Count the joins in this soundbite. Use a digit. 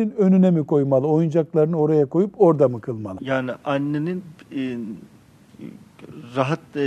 1